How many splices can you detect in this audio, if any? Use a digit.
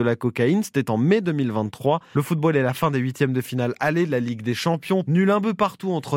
2